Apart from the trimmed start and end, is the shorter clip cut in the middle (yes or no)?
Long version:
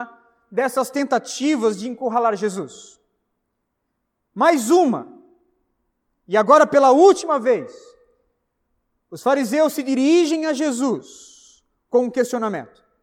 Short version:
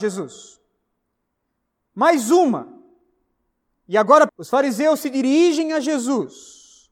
yes